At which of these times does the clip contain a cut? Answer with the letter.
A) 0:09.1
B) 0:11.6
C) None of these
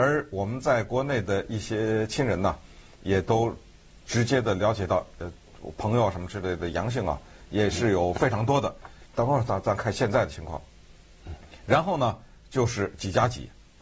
A